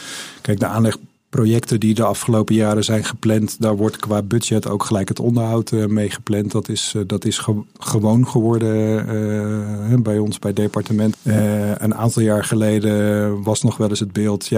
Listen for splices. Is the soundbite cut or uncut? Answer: cut